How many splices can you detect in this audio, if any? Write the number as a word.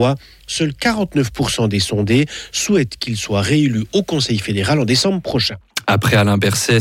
zero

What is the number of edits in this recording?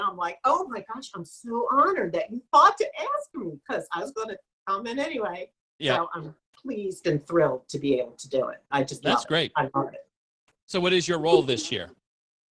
zero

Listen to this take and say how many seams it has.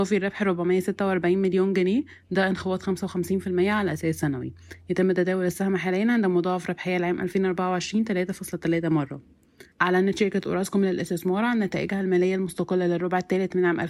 one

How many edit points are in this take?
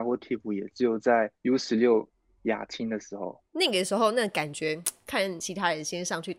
two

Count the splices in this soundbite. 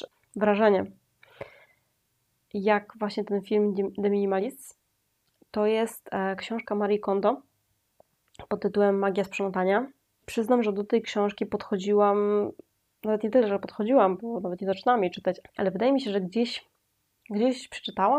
two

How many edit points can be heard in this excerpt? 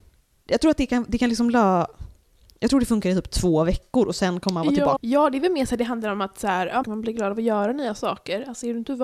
two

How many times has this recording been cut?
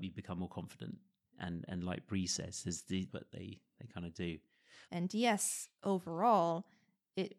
two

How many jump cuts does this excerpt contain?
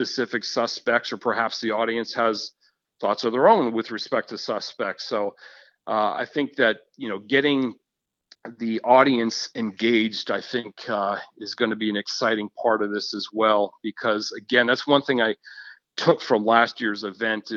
zero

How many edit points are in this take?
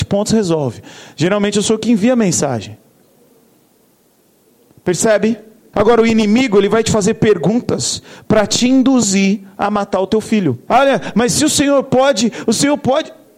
two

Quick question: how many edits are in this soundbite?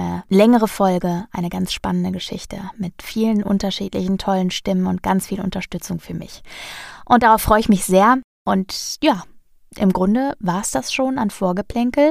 zero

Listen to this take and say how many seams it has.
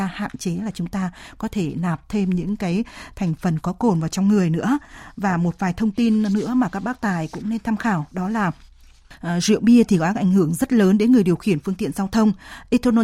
zero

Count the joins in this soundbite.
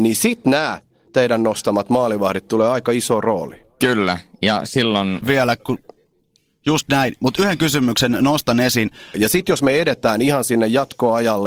two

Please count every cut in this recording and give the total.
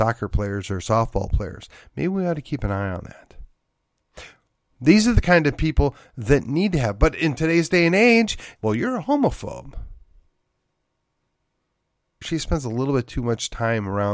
two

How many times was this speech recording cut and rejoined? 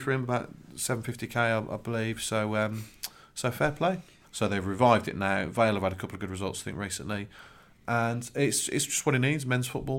one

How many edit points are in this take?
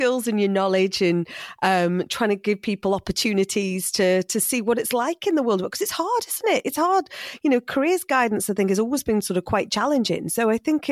zero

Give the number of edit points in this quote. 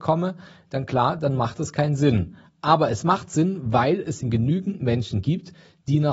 one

